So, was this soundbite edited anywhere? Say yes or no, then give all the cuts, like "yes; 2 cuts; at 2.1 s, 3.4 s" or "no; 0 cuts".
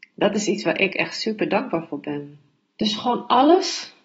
yes; 1 cut; at 2.7 s